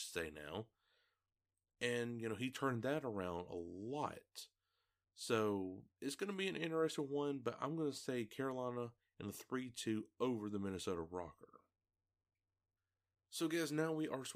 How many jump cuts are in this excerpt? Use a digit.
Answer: 0